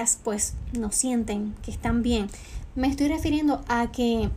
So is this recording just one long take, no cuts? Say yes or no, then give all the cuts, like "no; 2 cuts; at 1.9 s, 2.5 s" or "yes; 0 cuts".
yes; 0 cuts